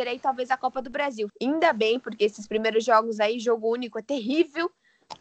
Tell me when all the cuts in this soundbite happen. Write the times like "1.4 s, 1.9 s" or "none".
1.3 s

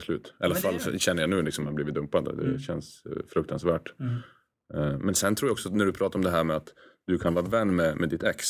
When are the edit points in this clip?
none

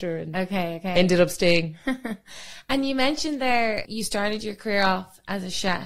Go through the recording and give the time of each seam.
3.8 s

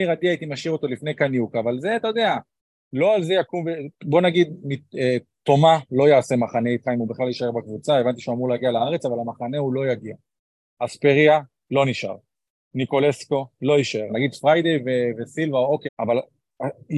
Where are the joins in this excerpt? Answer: 3.9 s, 14.1 s, 15.8 s

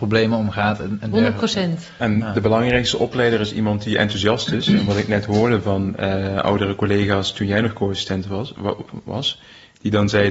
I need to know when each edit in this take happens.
none

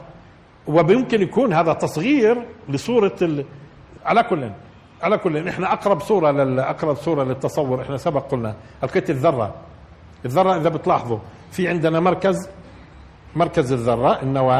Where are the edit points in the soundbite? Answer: 4.0 s

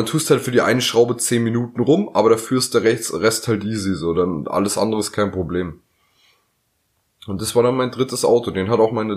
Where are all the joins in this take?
none

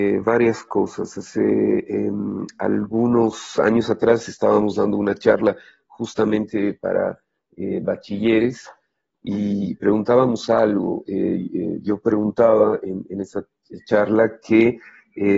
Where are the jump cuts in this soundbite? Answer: none

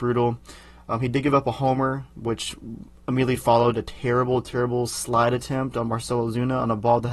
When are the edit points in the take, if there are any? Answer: none

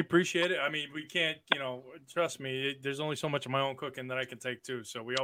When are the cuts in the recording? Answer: none

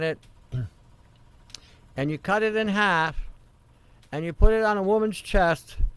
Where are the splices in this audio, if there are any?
none

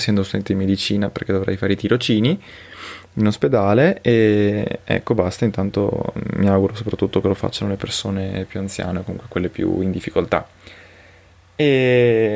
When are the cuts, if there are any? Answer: none

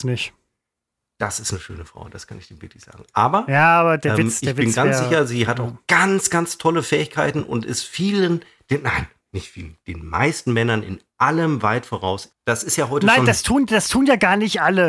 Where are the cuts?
12.3 s

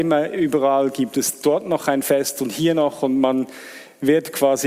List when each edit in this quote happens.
none

